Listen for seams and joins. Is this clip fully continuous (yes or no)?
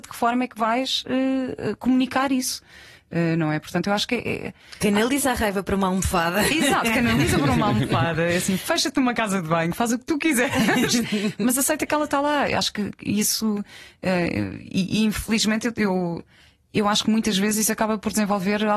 yes